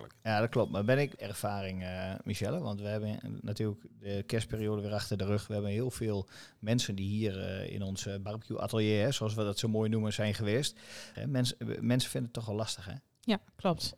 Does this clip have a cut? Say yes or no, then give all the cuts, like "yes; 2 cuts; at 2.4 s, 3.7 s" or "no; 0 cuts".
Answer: yes; 2 cuts; at 1.2 s, 11.1 s